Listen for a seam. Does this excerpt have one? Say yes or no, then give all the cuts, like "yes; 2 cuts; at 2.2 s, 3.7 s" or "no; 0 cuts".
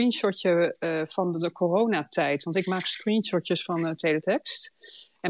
no; 0 cuts